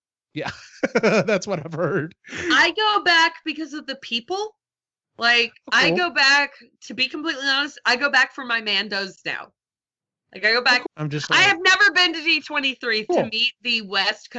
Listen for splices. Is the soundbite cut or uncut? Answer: cut